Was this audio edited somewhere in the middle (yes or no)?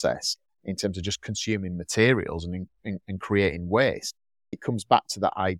no